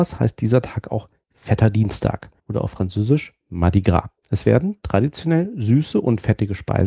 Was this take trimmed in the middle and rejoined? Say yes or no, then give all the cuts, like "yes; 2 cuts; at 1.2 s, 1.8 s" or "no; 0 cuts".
yes; 2 cuts; at 2.4 s, 4.2 s